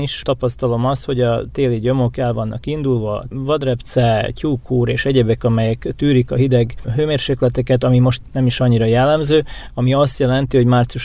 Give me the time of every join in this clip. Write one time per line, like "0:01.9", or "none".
0:09.7